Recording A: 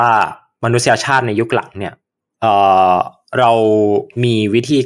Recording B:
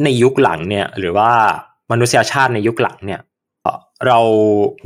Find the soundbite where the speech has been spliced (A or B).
B